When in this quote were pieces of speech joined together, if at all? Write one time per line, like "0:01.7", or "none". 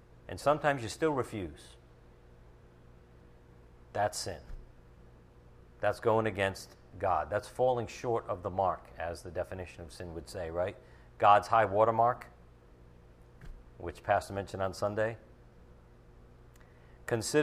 none